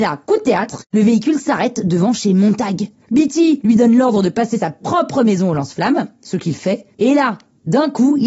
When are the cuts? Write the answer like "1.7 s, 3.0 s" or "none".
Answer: 3.0 s, 6.9 s